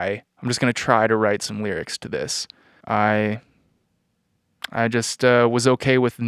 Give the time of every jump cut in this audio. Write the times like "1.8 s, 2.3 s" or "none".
2.8 s

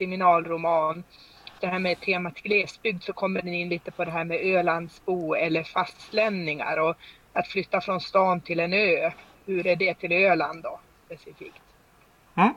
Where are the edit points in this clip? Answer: 1.6 s

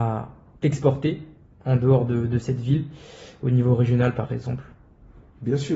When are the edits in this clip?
none

